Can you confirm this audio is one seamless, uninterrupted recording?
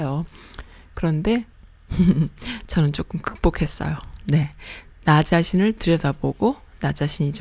no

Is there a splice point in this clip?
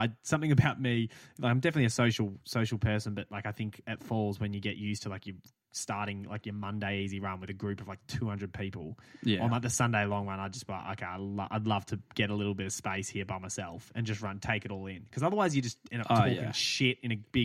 no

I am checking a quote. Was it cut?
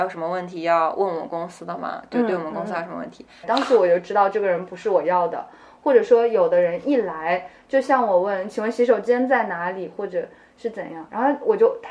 yes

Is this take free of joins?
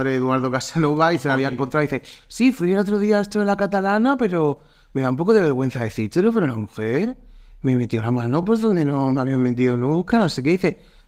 yes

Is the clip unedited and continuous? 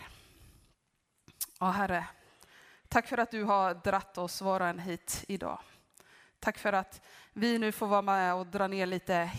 yes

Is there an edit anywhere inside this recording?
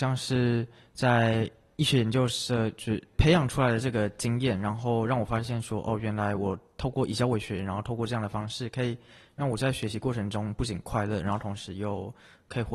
no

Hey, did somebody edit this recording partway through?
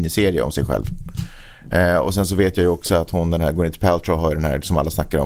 no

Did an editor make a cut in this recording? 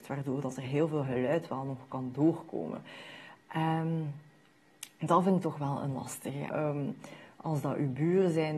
yes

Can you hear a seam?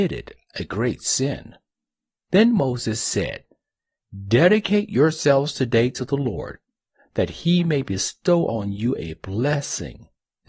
yes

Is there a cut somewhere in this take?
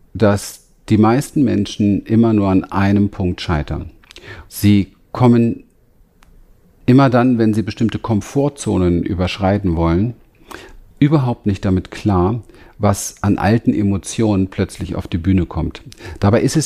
yes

